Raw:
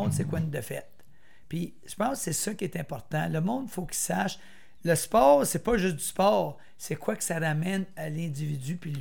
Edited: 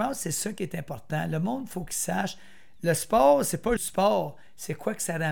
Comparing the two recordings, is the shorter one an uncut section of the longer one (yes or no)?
no